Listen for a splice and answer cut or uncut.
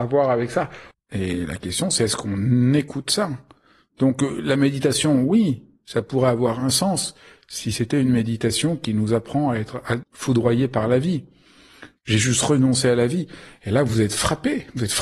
cut